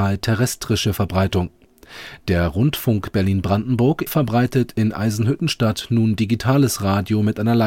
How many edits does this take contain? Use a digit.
1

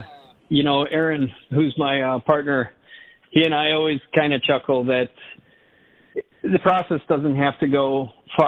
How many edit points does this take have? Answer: 0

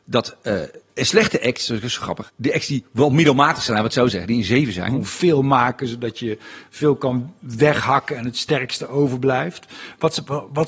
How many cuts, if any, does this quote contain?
2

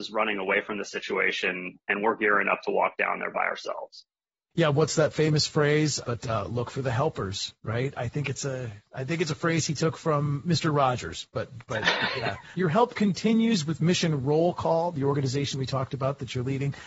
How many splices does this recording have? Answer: 2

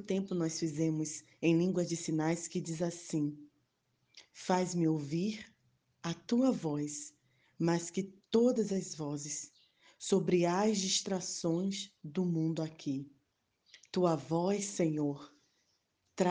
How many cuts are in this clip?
0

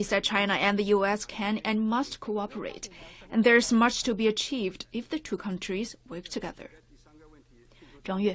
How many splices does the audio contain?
0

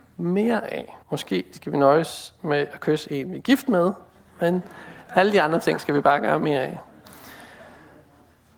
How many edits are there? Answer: 1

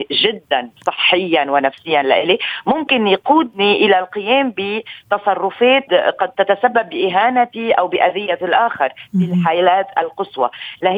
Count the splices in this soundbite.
1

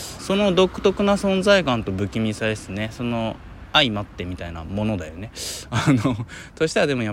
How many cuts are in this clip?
1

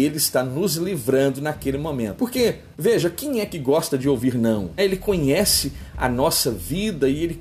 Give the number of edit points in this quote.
2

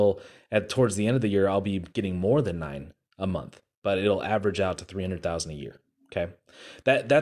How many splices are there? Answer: 0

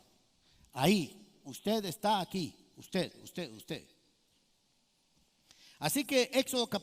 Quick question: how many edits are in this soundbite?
0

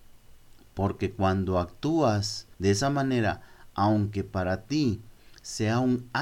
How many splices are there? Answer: 1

